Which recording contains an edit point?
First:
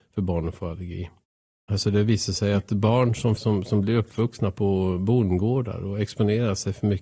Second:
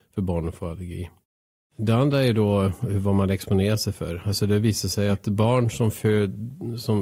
first; 2 cuts; at 1.7 s, 3.4 s

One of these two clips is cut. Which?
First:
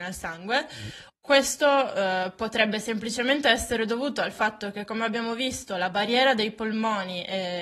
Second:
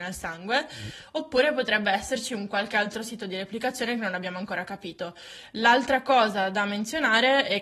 first; 1 cut; at 1.1 s

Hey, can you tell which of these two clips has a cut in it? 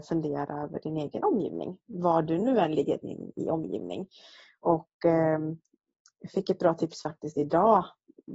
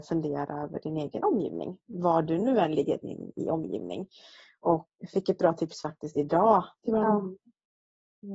second; 2 cuts; at 4.9 s, 6.8 s

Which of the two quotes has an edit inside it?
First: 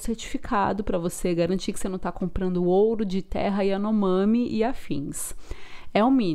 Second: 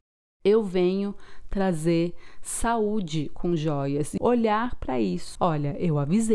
second; 2 cuts; at 4.2 s, 5.4 s

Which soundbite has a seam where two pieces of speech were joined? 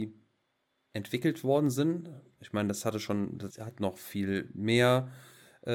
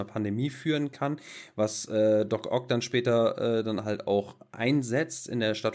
first; 1 cut; at 3.5 s

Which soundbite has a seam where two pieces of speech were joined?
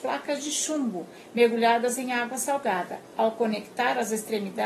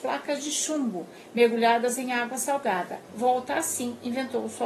second; 1 cut; at 3.1 s

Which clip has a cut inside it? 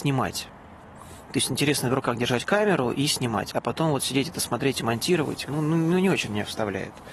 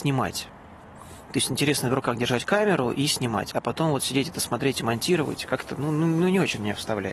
first; 1 cut; at 5.5 s

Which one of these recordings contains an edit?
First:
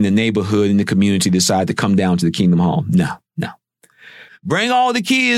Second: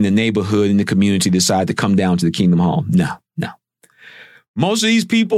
first; 1 cut; at 4.3 s

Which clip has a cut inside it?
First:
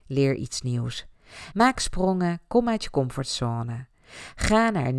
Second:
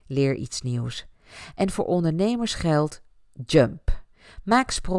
first; 1 cut; at 1.5 s

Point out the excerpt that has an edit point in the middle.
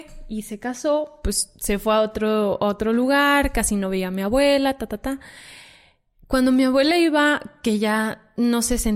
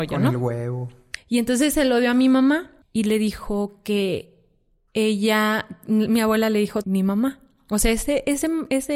second; 3 cuts; at 1.2 s, 2.8 s, 6.8 s

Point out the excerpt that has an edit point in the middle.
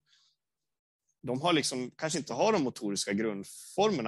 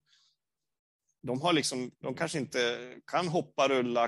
second; 1 cut; at 1.9 s

